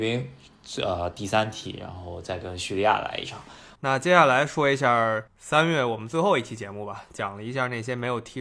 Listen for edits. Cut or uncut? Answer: cut